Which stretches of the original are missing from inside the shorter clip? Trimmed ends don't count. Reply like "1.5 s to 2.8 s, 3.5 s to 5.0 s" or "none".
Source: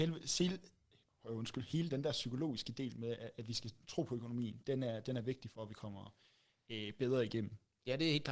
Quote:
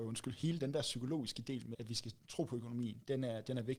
3.0 s to 3.3 s